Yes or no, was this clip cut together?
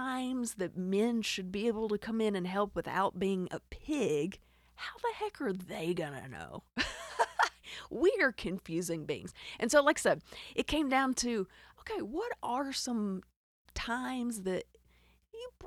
no